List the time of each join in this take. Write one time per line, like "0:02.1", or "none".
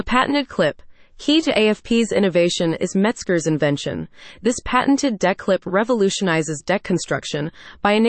none